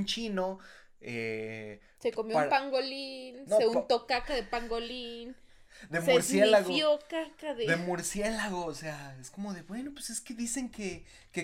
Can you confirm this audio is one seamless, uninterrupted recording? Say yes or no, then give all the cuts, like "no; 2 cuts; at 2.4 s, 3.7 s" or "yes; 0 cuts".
yes; 0 cuts